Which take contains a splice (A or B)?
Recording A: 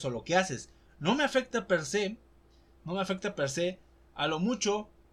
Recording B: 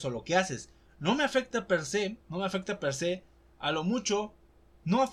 B